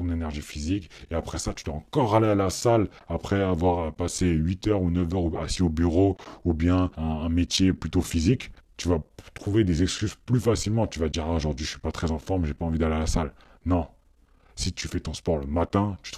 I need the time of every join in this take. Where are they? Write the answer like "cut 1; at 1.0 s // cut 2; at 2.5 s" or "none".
none